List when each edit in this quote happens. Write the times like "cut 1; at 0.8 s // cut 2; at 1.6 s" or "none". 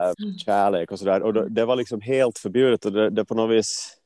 none